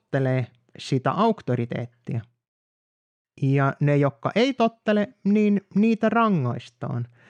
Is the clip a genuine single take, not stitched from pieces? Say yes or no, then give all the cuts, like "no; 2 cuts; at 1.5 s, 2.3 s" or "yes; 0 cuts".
yes; 0 cuts